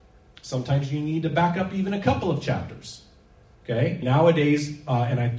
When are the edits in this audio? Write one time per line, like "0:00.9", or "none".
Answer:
0:04.0

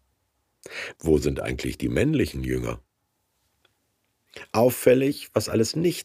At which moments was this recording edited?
0:00.9

